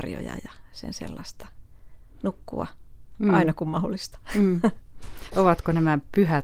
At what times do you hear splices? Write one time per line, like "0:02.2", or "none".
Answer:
none